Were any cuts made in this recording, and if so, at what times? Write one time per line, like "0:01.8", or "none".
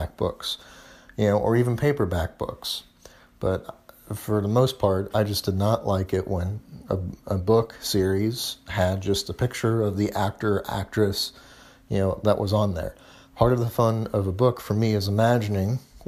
none